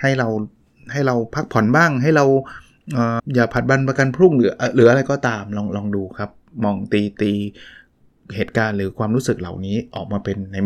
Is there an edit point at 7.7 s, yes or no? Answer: no